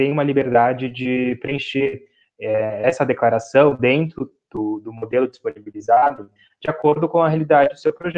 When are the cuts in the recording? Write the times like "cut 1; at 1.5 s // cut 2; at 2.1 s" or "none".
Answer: none

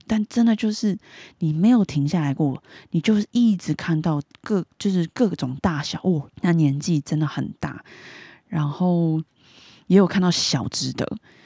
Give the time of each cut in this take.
cut 1; at 6.3 s

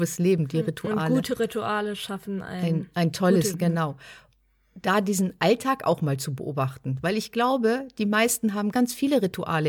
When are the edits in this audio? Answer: cut 1; at 3.5 s // cut 2; at 8.7 s

